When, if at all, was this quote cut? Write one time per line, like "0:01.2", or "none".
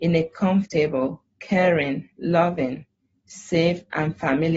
none